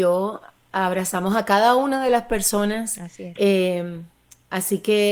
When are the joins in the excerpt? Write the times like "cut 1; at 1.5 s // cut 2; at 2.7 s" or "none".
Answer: cut 1; at 3.4 s